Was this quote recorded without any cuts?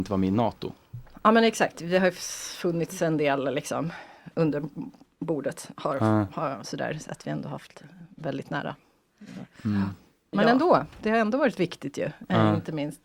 yes; 0 cuts

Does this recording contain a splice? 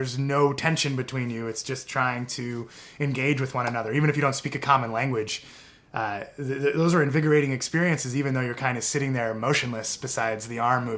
no; 0 cuts

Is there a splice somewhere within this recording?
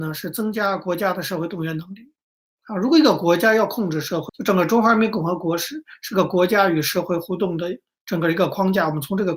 yes; 1 cut; at 4.3 s

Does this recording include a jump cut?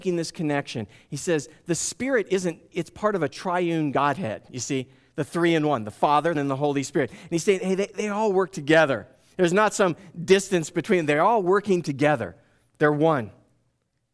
yes; 1 cut; at 6.3 s

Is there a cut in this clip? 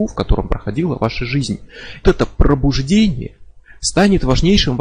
yes; 1 cut; at 2.0 s

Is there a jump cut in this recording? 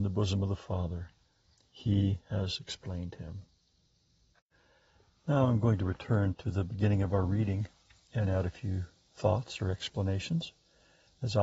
no; 0 cuts

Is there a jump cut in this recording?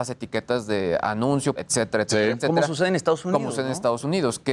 yes; 1 cut; at 1.6 s

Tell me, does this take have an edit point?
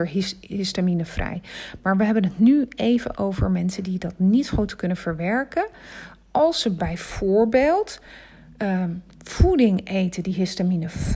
no; 0 cuts

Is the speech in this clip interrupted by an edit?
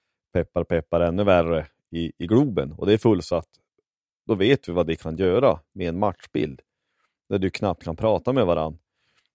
no; 0 cuts

